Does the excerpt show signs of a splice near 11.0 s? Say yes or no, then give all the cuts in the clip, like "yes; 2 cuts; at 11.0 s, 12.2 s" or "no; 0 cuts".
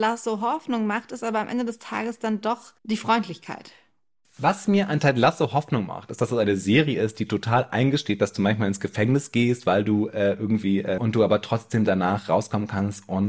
yes; 2 cuts; at 2.8 s, 11.0 s